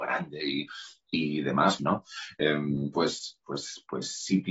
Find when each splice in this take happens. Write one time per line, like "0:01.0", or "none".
0:01.8
0:02.9